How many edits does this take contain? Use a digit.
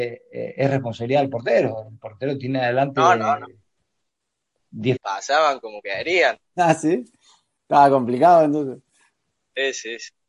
1